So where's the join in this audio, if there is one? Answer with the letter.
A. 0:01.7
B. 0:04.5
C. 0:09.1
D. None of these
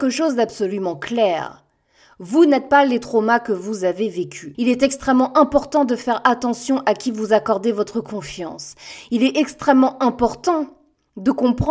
B